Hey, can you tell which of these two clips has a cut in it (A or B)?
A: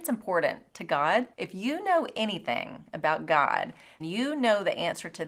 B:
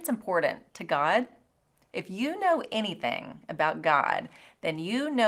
A